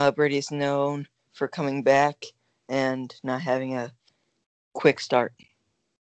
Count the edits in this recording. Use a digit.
0